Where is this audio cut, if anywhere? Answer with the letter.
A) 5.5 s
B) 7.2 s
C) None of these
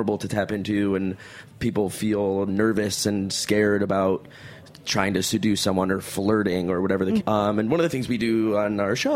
B